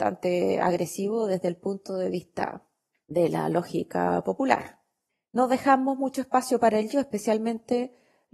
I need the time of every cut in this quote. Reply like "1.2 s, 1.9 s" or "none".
none